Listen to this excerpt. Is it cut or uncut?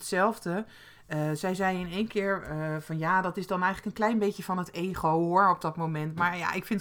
uncut